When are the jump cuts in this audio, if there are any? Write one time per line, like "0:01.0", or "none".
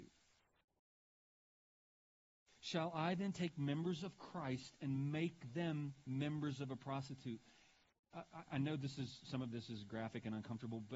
none